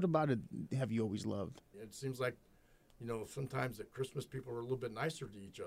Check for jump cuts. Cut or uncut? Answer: cut